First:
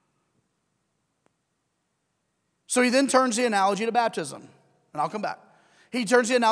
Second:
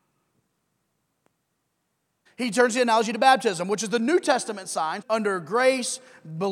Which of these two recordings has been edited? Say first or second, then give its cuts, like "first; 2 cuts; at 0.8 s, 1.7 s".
second; 2 cuts; at 2.3 s, 5.0 s